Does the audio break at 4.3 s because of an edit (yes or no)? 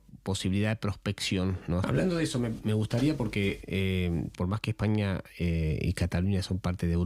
yes